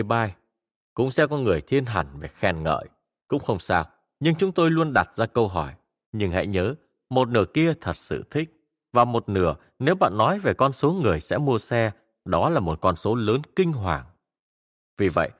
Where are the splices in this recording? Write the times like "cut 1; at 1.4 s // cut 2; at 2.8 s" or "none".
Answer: cut 1; at 6.0 s